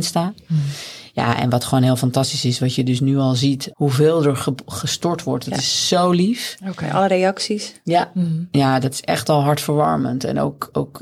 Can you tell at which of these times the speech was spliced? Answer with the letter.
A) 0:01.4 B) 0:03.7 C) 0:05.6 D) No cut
B